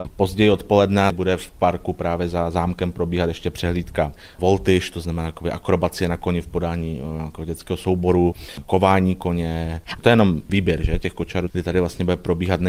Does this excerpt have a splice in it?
yes; 2 cuts; at 10.0 s, 11.5 s

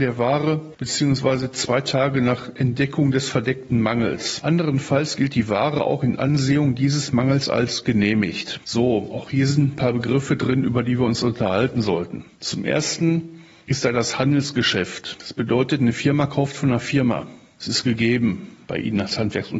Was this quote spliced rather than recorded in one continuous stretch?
yes; 1 cut; at 4.4 s

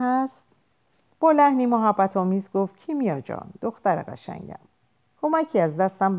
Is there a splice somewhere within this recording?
yes; 1 cut; at 1.1 s

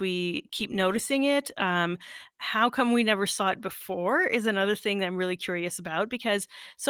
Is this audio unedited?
yes; 0 cuts

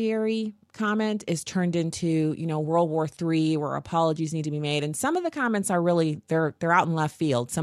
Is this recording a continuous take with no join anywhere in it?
yes; 0 cuts

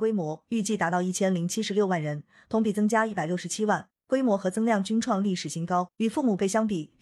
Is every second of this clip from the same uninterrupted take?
no; 1 cut; at 5.9 s

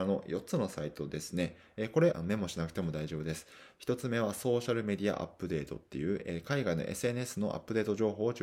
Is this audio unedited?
no; 1 cut; at 2.1 s

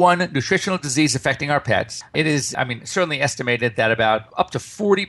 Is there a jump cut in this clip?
no; 0 cuts

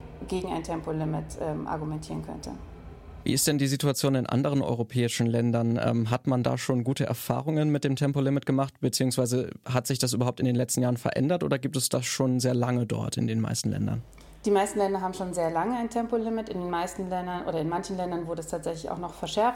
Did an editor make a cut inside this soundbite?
no; 0 cuts

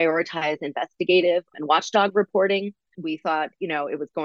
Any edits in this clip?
yes; 1 cut; at 2.9 s

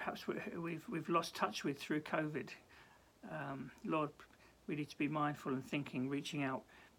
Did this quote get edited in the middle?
no; 0 cuts

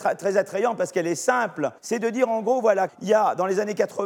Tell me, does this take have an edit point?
yes; 2 cuts; at 1.8 s, 2.9 s

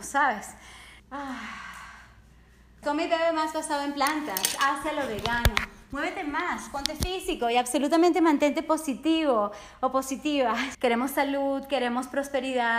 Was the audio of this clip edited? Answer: yes; 3 cuts; at 1.0 s, 2.8 s, 10.7 s

